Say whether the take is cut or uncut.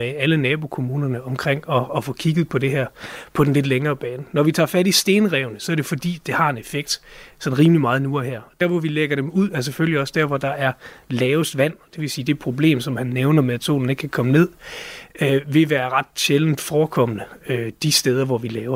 uncut